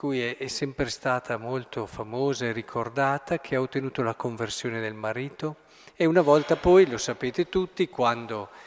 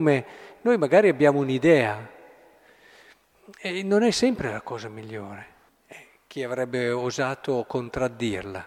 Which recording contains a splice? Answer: second; 1 cut; at 5.7 s

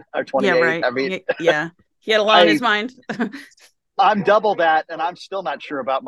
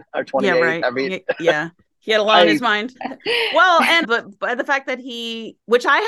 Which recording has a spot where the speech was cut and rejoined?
second; 2 cuts; at 2.9 s, 4.0 s

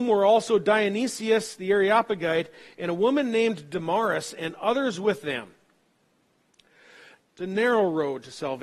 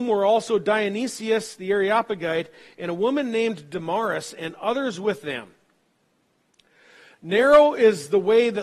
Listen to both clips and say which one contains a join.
first; 1 cut; at 7.2 s

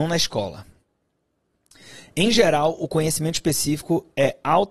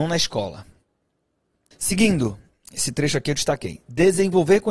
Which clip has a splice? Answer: second; 1 cut; at 1.7 s

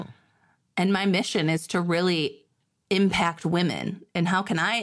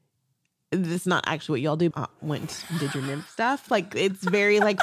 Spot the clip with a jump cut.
second; 1 cut; at 1.9 s

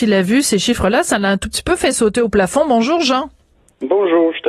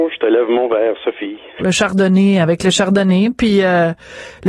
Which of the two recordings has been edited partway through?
second; 1 cut; at 1.6 s

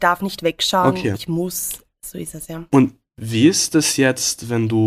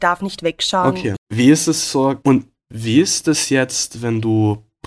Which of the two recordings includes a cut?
second; 2 cuts; at 1.2 s, 2.2 s

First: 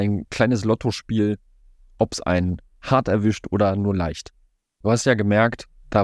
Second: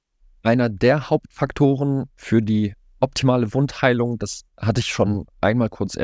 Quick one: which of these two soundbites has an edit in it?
first; 1 cut; at 4.8 s

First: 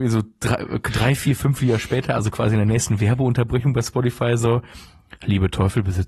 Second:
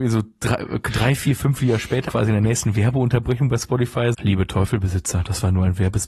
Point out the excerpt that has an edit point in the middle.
second; 2 cuts; at 2.1 s, 4.1 s

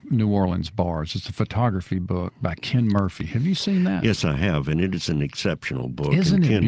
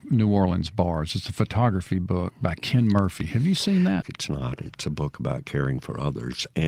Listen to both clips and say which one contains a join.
second; 1 cut; at 4.0 s

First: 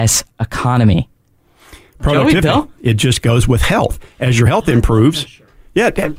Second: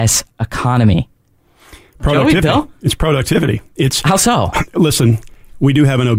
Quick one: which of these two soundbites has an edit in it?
first; 1 cut; at 2.8 s

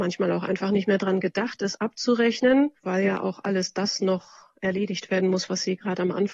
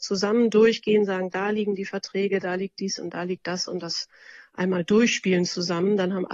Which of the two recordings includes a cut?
first; 1 cut; at 2.8 s

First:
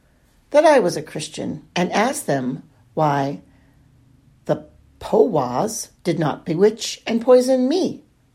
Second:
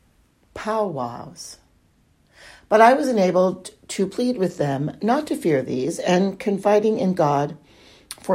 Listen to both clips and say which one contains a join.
first; 2 cuts; at 1.7 s, 6.0 s

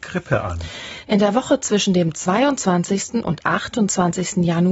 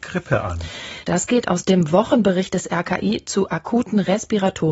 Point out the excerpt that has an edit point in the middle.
second; 1 cut; at 1.0 s

